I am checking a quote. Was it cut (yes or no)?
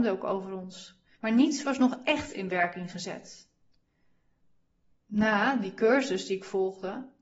yes